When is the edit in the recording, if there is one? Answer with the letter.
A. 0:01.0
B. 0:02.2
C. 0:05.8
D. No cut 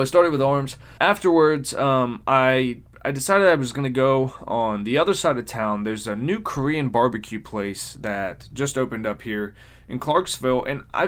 A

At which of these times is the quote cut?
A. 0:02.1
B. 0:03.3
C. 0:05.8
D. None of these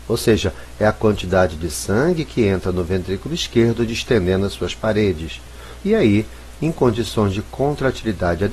C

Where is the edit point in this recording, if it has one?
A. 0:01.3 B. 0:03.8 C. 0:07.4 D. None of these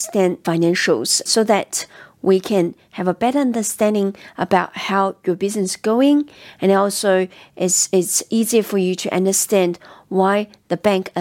A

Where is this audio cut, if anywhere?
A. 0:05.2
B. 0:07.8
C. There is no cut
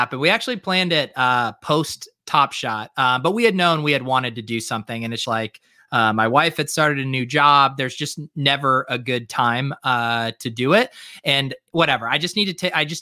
A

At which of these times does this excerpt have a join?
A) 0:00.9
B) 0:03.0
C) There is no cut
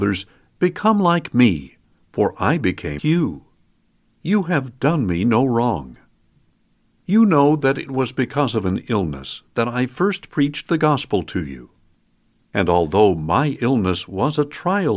B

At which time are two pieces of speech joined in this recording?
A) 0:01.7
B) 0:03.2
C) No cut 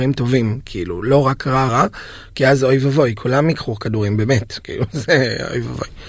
A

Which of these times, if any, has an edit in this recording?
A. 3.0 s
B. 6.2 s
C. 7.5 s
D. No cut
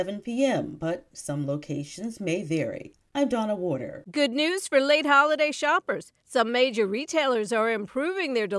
D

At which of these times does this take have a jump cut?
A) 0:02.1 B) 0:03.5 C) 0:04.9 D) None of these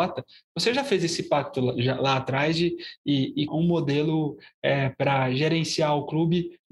B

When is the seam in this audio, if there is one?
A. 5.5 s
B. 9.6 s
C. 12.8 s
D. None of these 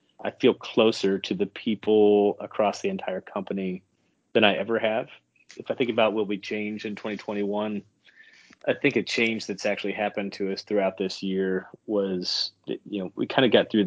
A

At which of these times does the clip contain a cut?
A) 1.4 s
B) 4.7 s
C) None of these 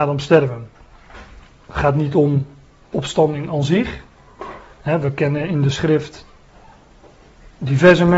C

